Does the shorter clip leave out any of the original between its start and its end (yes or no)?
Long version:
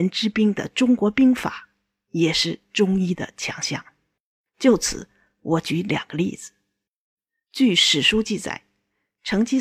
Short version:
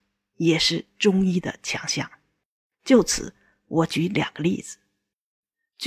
no